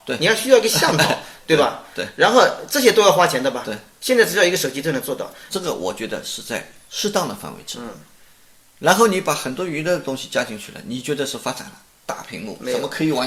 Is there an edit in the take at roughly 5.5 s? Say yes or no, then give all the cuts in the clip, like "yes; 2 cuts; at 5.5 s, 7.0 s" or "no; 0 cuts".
yes; 1 cut; at 5.5 s